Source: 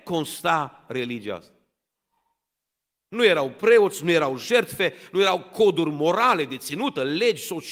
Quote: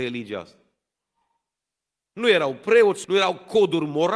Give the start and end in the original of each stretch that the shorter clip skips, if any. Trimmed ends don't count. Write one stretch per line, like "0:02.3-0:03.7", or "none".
0:04.0-0:05.1